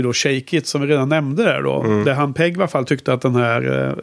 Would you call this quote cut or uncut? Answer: uncut